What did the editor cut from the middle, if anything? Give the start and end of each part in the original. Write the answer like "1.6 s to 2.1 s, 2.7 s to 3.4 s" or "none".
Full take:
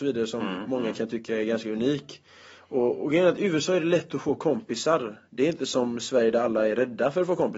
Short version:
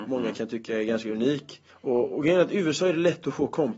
2.3 s to 2.6 s